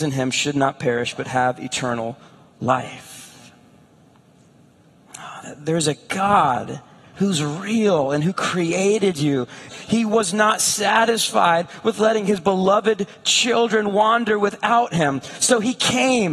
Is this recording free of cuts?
no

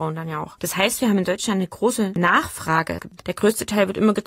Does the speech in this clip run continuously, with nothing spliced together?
no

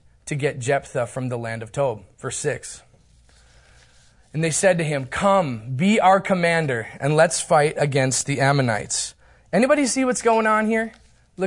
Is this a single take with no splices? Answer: yes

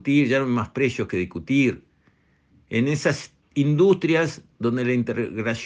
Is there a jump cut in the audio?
no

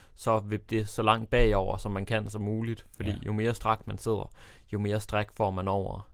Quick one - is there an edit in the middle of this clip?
no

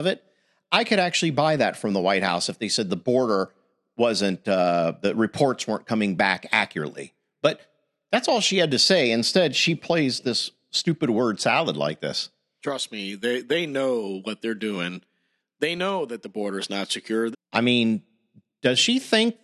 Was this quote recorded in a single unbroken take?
no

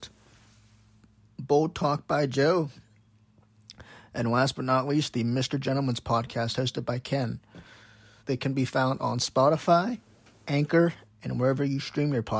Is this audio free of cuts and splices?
no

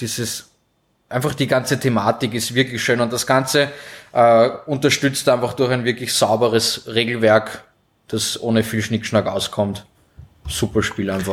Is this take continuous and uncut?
yes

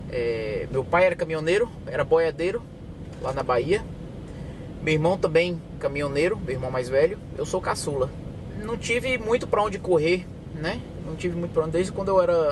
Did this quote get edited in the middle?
no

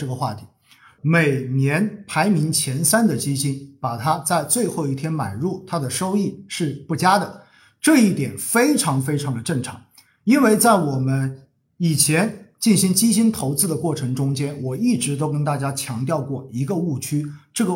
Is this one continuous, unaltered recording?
no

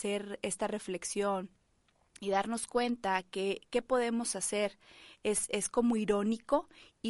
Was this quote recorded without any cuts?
yes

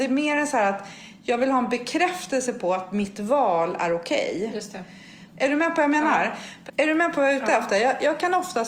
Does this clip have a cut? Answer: yes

